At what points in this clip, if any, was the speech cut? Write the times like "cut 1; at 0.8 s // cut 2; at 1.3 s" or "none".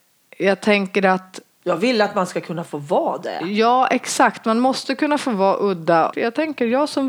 cut 1; at 6.1 s

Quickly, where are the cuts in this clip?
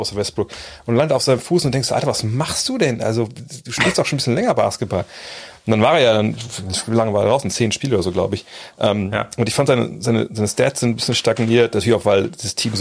none

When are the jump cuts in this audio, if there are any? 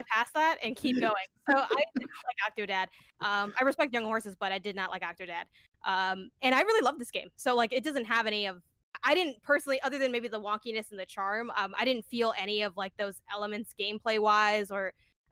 none

